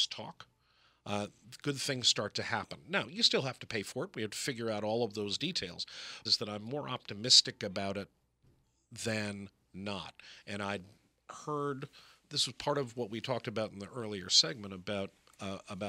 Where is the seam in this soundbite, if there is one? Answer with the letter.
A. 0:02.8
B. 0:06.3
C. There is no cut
B